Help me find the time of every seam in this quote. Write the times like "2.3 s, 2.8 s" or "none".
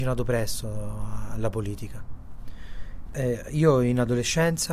3.1 s

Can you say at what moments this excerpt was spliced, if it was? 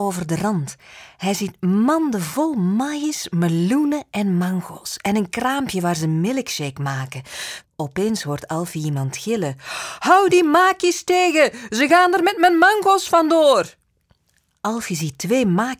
7.6 s

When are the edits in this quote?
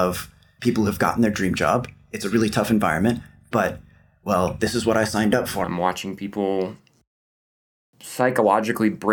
5.6 s

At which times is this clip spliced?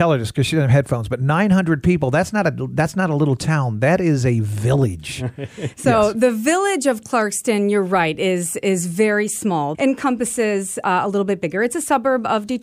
9.7 s

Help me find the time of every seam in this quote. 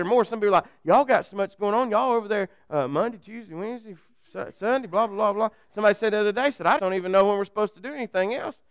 6.8 s

